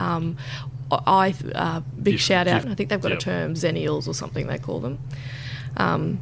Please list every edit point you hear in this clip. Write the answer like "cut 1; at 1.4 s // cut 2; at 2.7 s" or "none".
cut 1; at 2.6 s